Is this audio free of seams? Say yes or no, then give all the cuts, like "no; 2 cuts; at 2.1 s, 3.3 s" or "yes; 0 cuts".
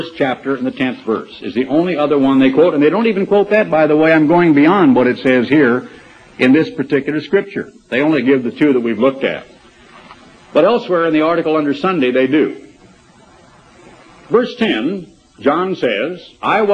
yes; 0 cuts